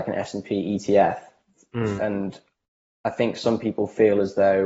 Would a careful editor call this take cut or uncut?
cut